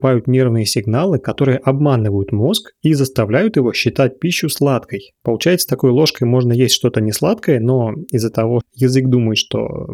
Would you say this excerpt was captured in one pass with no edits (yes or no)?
no